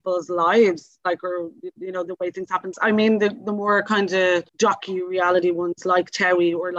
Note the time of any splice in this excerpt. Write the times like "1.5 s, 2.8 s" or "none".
2.7 s, 4.5 s